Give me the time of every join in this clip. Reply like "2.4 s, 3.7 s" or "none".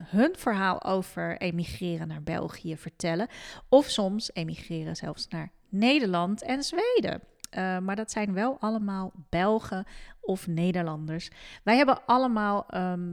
none